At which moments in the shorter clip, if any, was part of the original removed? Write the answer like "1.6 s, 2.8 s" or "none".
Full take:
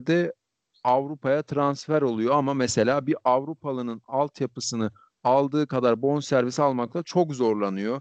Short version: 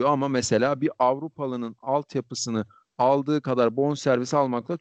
none